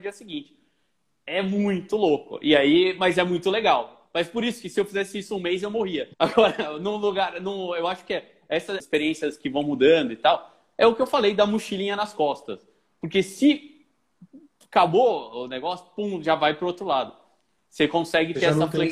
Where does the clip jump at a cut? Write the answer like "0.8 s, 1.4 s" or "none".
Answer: 6.1 s, 8.8 s